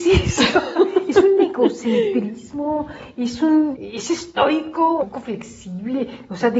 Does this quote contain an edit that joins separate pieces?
yes; 2 cuts; at 3.7 s, 5.0 s

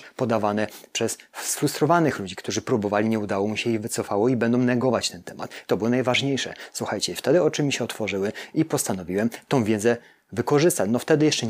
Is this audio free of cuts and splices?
no; 1 cut; at 5.7 s

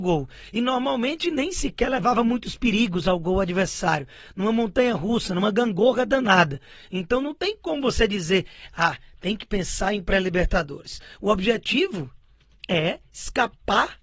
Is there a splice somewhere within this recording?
no; 0 cuts

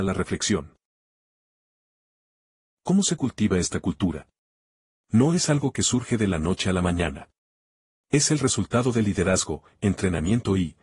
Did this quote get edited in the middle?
no; 0 cuts

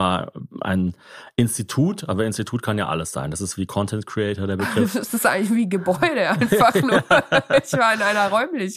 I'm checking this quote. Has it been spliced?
no; 0 cuts

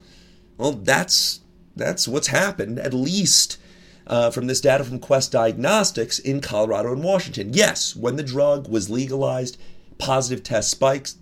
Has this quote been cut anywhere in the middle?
no; 0 cuts

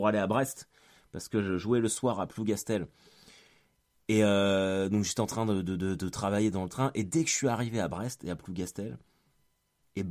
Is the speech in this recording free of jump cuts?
yes; 0 cuts

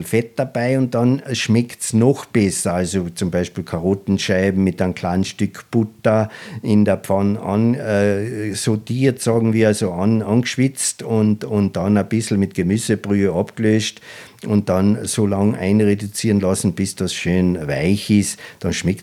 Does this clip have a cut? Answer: no; 0 cuts

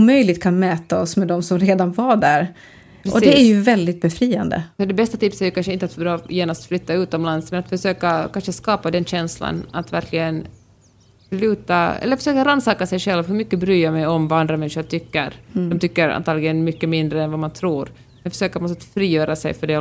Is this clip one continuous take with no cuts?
yes; 0 cuts

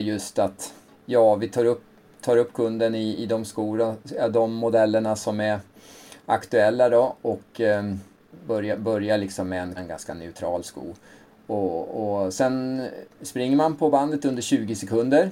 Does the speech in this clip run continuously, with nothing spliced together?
no; 1 cut; at 9.8 s

